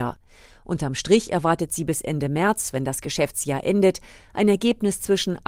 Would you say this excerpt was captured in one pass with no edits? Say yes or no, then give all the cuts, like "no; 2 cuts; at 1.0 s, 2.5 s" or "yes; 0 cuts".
yes; 0 cuts